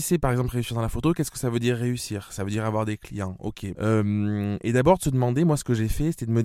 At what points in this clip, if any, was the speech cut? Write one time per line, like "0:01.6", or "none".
0:03.7